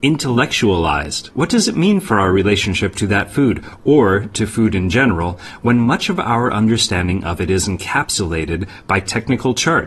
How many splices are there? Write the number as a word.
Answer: one